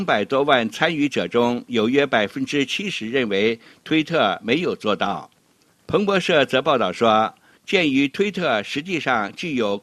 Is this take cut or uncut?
cut